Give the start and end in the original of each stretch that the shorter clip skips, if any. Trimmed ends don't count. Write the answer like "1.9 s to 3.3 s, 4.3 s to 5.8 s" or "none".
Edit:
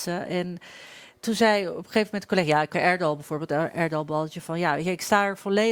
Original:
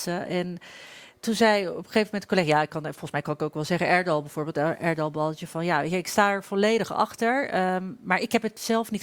2.7 s to 3.8 s